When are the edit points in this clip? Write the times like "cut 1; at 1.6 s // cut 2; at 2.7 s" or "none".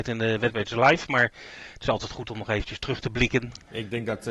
none